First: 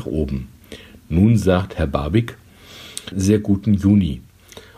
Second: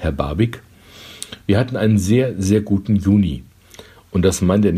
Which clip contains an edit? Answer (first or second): first